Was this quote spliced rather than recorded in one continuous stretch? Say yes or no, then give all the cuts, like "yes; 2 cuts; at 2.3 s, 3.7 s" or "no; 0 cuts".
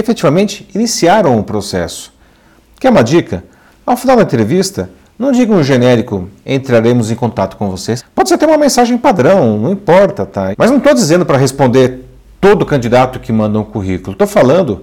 yes; 2 cuts; at 8.0 s, 10.5 s